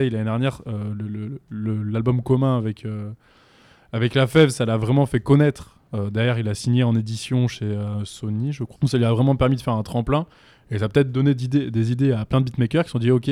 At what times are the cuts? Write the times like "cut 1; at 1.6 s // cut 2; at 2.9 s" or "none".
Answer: cut 1; at 8.8 s